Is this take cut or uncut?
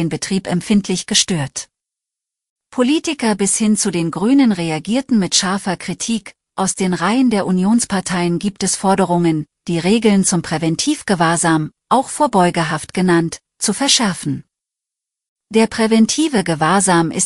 uncut